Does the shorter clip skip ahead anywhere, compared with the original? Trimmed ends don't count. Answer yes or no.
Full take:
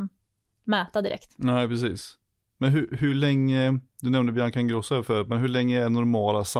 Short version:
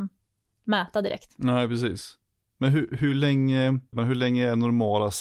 yes